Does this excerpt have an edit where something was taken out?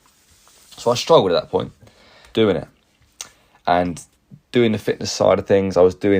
yes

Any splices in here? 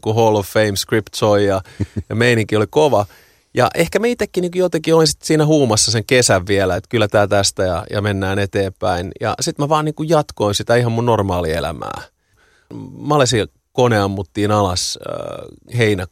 no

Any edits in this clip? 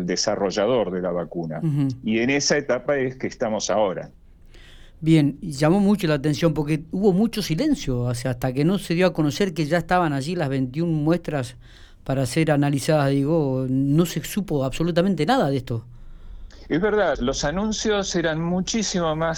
yes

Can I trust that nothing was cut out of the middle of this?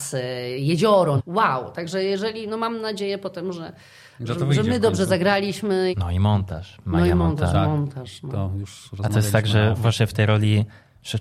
no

